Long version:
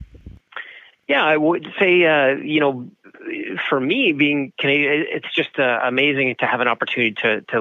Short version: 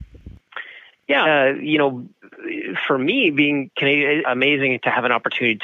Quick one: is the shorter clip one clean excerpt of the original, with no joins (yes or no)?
no